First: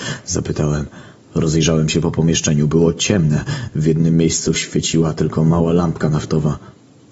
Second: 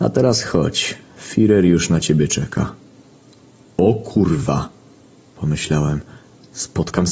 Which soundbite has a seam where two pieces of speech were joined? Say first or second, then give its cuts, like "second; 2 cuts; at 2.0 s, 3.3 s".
first; 1 cut; at 1.3 s